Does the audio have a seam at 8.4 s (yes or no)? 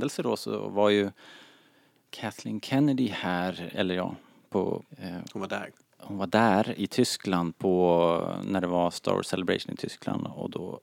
no